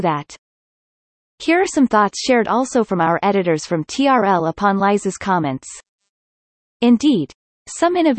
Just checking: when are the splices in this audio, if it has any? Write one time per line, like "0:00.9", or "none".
none